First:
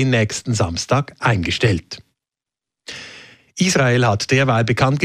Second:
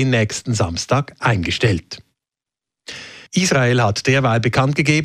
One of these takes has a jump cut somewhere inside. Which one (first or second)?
second